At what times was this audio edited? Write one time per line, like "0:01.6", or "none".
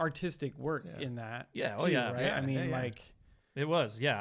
none